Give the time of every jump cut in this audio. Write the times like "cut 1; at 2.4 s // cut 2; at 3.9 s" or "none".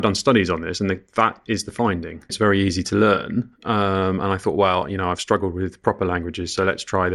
cut 1; at 2.3 s